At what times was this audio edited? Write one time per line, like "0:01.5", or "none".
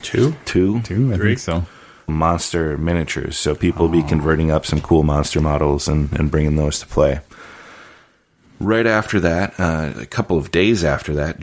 0:02.1
0:09.9